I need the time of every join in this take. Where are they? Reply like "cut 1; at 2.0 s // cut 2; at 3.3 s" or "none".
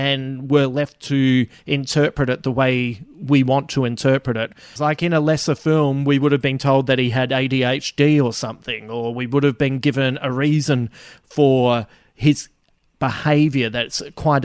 cut 1; at 4.8 s